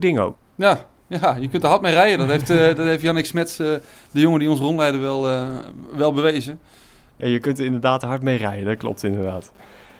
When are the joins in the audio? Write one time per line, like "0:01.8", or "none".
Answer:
none

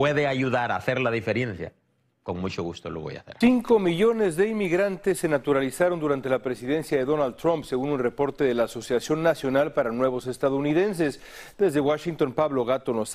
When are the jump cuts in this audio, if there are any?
0:03.4
0:11.5

